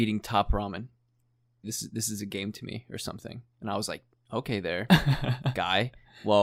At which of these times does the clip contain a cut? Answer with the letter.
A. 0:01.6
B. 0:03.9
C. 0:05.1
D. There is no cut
A